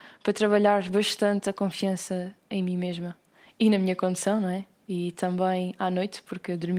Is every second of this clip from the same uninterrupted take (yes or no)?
yes